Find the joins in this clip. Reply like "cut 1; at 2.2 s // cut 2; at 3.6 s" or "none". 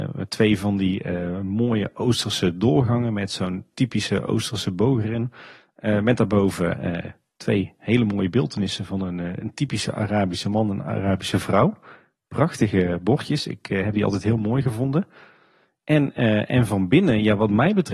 none